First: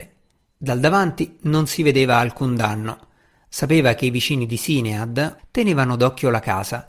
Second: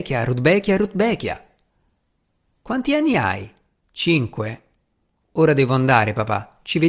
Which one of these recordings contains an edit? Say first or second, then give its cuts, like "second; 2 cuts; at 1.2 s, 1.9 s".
first; 1 cut; at 5.4 s